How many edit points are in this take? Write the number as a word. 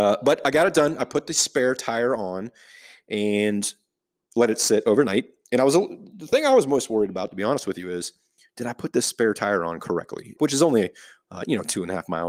one